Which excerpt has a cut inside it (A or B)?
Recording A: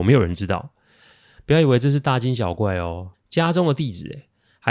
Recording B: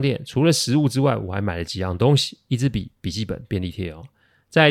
A